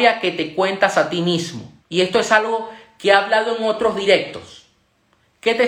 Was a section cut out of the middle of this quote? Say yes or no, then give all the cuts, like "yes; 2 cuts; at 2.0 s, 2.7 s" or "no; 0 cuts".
yes; 1 cut; at 1.8 s